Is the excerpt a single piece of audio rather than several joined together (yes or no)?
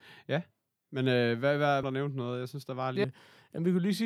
no